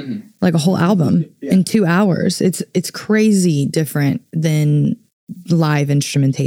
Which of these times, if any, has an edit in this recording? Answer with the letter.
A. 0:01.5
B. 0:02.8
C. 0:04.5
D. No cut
D